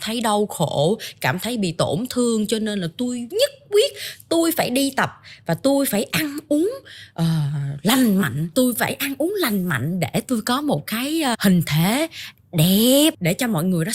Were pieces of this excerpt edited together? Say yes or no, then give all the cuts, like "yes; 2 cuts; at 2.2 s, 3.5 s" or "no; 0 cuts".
yes; 1 cut; at 11.3 s